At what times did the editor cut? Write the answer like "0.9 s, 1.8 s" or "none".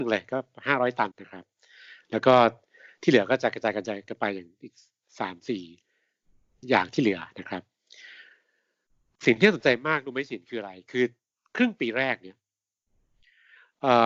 1.1 s